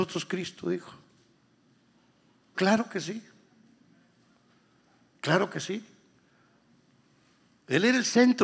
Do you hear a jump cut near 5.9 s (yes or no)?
no